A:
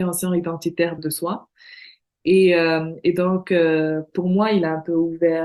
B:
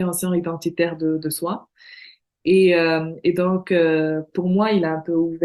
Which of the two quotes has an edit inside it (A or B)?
A